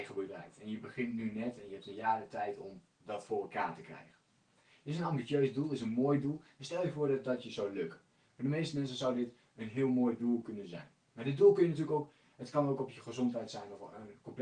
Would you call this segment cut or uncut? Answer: uncut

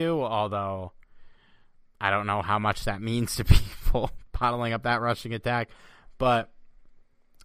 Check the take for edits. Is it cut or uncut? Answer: uncut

